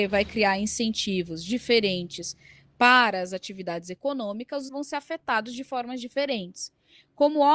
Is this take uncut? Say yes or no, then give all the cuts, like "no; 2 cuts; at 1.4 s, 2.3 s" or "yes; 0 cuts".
no; 1 cut; at 4.7 s